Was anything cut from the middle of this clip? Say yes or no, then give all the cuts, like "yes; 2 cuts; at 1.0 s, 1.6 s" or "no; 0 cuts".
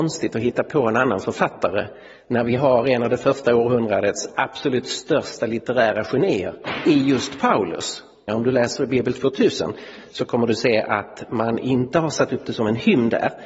yes; 1 cut; at 8.3 s